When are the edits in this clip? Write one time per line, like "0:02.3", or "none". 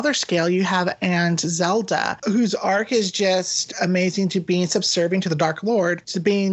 none